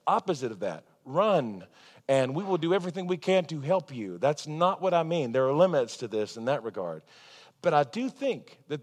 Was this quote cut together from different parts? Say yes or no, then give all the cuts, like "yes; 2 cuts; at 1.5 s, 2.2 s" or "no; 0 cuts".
no; 0 cuts